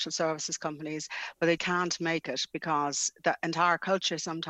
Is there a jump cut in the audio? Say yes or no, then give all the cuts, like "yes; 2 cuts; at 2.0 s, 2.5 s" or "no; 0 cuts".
yes; 1 cut; at 1.6 s